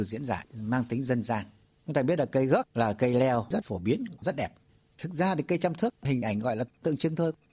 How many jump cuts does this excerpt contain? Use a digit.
1